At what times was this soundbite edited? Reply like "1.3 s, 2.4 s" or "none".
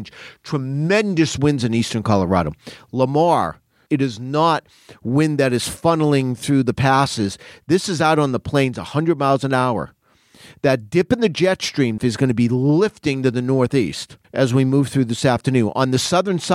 3.9 s, 12.0 s, 14.2 s

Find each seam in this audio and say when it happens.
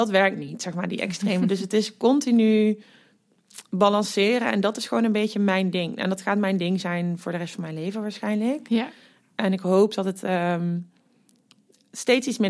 none

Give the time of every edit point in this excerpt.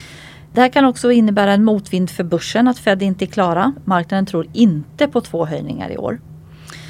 3.8 s

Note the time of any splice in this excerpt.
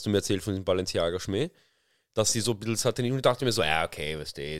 none

